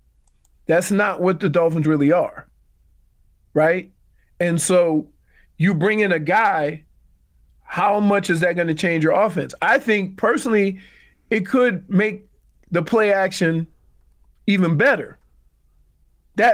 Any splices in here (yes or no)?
no